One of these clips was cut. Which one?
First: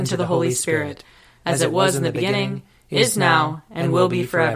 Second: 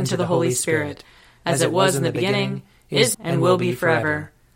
second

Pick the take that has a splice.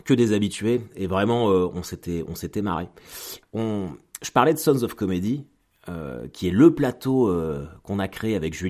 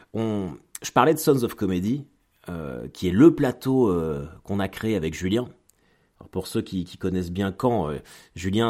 first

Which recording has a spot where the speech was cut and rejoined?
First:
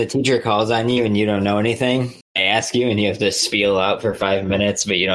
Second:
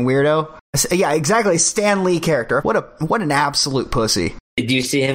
second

